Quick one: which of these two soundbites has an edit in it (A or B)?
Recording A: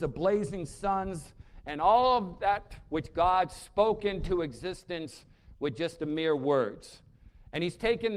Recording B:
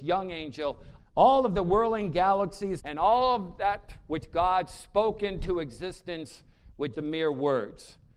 B